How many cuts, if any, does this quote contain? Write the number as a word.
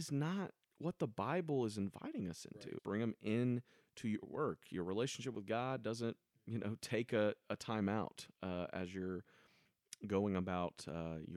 one